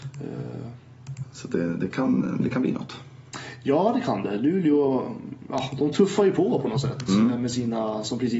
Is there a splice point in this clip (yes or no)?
no